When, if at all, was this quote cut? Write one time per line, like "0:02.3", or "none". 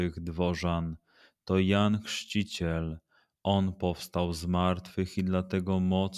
none